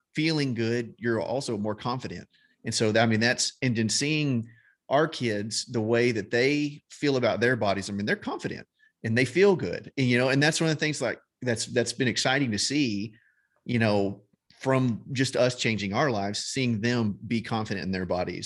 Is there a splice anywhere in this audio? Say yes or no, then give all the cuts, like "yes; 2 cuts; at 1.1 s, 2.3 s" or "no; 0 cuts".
no; 0 cuts